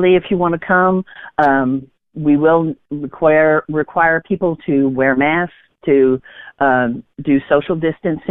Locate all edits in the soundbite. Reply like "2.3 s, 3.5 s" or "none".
none